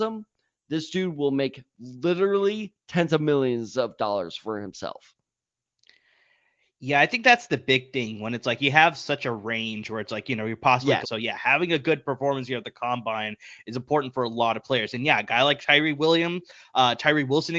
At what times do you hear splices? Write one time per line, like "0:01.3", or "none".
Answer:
0:11.0

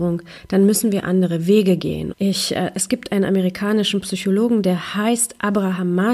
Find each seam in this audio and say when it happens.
0:02.1

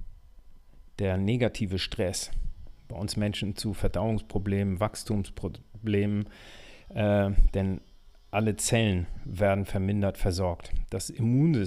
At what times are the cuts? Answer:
none

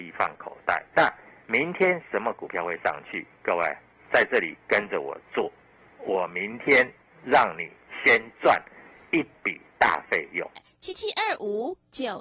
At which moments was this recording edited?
0:00.9
0:10.6

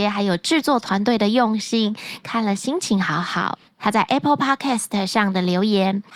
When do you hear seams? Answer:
0:02.2
0:03.6

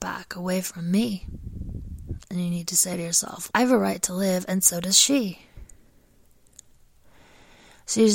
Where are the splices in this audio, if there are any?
0:03.5

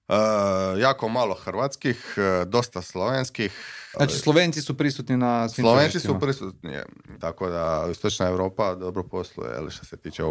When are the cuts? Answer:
0:03.9
0:07.2

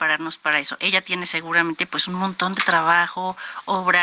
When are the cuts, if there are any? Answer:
none

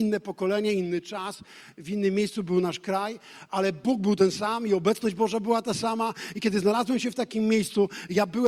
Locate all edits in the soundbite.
none

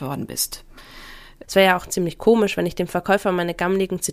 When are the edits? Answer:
0:01.4

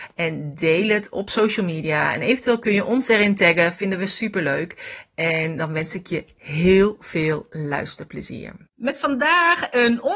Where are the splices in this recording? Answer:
0:08.7

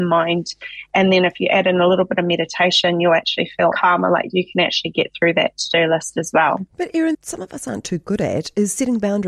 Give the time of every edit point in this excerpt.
0:03.7
0:07.1

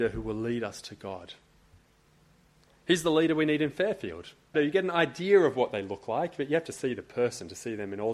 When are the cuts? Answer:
0:04.5

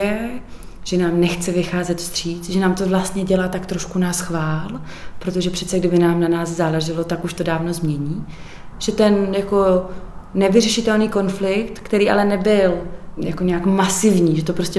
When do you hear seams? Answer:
0:08.7

